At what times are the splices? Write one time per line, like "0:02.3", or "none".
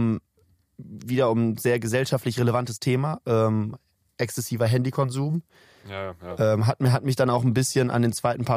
none

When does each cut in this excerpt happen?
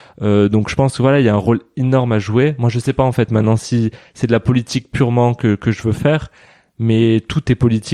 none

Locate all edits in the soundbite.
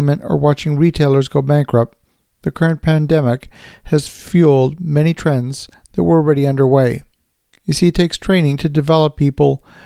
none

